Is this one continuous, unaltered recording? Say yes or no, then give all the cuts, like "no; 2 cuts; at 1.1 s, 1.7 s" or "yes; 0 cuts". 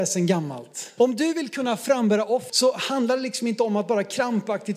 no; 2 cuts; at 1.0 s, 2.5 s